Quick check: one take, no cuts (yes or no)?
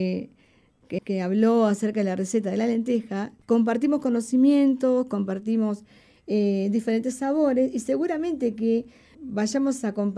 no